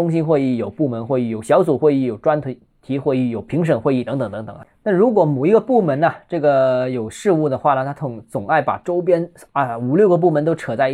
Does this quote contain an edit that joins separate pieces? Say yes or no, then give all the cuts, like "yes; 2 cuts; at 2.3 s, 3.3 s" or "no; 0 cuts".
no; 0 cuts